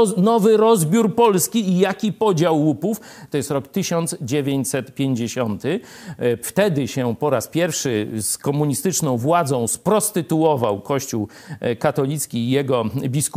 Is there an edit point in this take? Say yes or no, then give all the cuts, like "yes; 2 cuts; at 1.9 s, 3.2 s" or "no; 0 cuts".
yes; 2 cuts; at 3.3 s, 6.4 s